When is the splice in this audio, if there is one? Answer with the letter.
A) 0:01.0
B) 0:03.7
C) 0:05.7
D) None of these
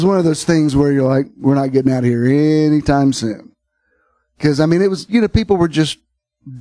D